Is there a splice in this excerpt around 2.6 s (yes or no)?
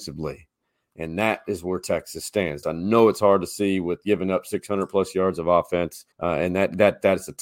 yes